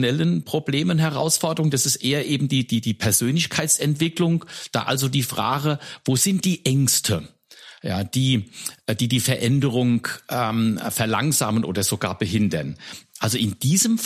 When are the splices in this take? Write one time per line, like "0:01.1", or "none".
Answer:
none

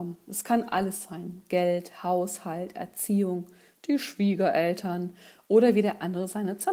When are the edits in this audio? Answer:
none

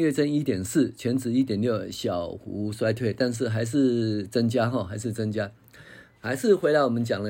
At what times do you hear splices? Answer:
none

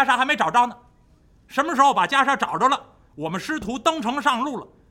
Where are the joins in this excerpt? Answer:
0:03.1

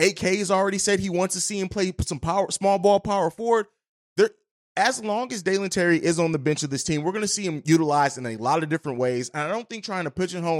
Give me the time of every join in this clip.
none

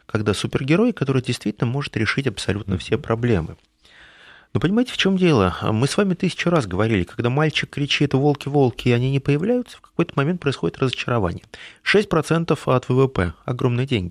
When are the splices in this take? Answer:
none

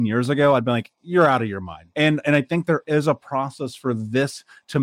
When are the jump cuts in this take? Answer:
0:01.9

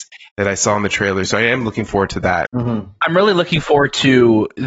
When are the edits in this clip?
0:02.5

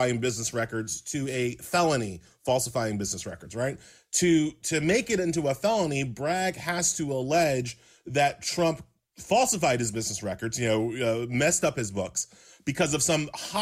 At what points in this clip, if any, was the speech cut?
none

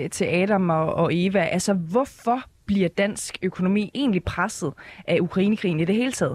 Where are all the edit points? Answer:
none

